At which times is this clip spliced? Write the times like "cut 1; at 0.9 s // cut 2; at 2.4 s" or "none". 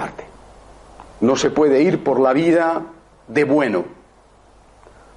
cut 1; at 1.1 s